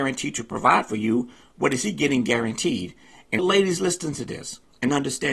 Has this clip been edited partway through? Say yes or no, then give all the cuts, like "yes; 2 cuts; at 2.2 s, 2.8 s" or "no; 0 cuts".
no; 0 cuts